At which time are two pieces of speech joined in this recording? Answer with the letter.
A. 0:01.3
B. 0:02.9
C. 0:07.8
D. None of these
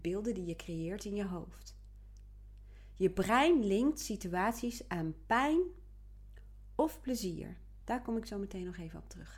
D